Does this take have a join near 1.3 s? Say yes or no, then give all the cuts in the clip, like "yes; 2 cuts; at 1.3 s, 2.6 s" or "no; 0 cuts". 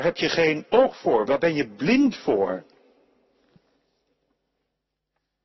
no; 0 cuts